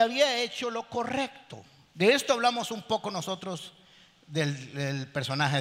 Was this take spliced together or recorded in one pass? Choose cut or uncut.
cut